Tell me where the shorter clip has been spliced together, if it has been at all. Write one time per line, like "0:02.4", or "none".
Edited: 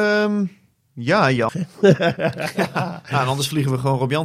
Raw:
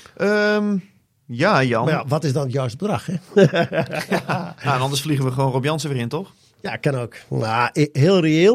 0:01.5